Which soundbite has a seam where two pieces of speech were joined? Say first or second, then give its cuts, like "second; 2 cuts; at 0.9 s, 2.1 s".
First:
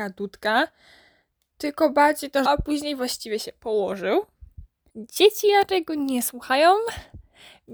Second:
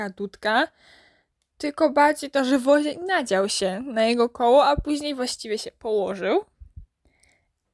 first; 2 cuts; at 2.5 s, 4.9 s